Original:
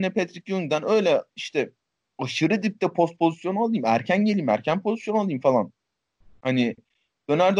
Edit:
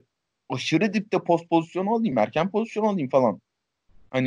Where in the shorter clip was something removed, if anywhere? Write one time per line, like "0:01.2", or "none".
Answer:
0:02.1